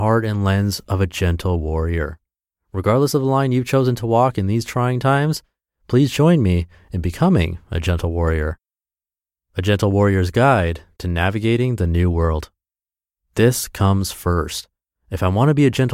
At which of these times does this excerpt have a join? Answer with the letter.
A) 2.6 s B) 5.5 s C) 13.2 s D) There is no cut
C